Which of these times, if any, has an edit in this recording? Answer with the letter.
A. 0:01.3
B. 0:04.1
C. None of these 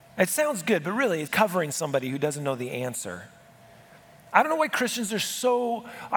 A